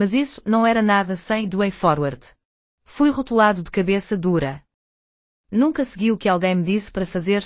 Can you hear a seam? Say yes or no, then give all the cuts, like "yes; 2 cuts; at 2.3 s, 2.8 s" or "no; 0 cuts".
yes; 1 cut; at 2.7 s